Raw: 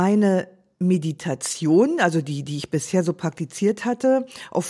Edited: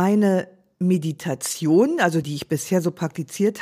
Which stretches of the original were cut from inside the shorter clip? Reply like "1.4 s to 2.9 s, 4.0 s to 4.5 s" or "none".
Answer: 2.2 s to 2.4 s